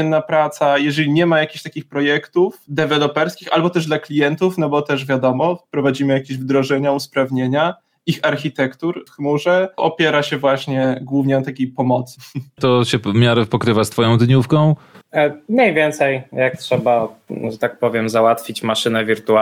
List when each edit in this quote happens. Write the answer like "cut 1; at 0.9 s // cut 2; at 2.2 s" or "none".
cut 1; at 9.1 s // cut 2; at 12.6 s